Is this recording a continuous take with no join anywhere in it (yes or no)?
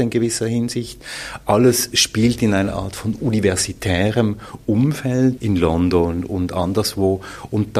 no